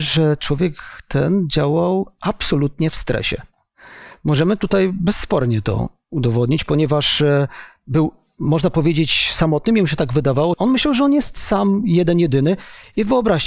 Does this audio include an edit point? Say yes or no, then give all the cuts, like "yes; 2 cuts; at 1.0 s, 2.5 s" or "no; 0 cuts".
yes; 1 cut; at 10.5 s